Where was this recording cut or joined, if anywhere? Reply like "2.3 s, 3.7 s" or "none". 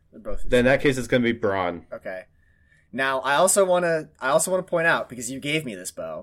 none